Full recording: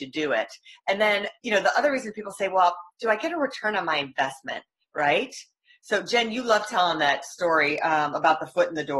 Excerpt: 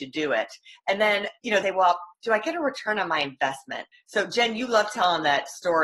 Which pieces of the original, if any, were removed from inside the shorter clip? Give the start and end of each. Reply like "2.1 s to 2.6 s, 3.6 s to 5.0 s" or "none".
1.6 s to 2.4 s, 4.7 s to 5.7 s